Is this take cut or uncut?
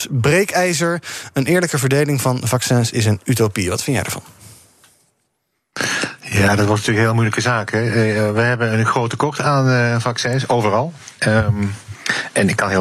uncut